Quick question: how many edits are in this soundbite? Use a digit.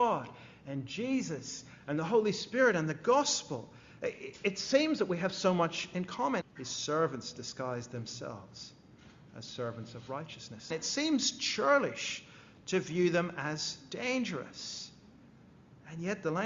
2